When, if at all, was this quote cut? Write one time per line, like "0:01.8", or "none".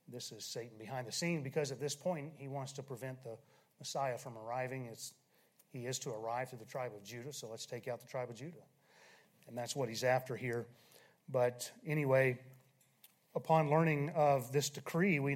none